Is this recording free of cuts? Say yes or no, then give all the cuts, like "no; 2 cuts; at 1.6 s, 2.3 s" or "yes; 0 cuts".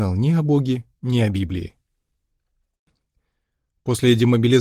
yes; 0 cuts